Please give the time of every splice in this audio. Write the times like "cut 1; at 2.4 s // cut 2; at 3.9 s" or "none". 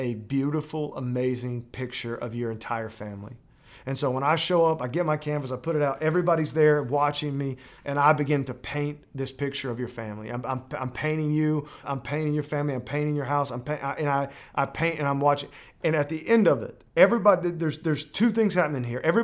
cut 1; at 11.8 s